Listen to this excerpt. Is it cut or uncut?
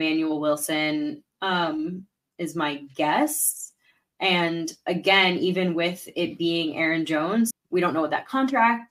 cut